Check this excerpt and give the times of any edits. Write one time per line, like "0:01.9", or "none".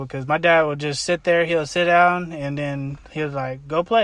none